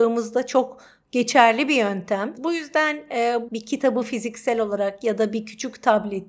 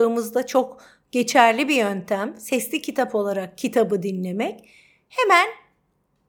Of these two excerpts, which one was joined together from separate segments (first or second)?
first